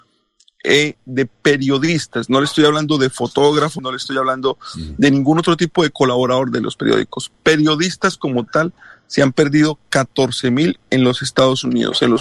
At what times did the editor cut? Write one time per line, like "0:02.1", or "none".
0:03.8